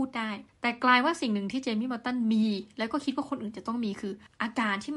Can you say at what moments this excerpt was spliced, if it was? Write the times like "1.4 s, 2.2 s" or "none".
none